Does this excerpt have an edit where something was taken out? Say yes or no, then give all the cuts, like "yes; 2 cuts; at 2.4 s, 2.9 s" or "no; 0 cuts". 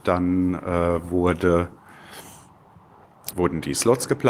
yes; 1 cut; at 3.3 s